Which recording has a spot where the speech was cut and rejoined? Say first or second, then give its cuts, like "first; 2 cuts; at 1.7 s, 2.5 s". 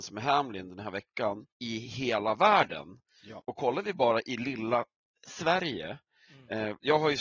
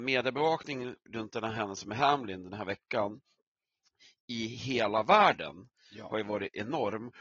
first; 2 cuts; at 1.5 s, 3.4 s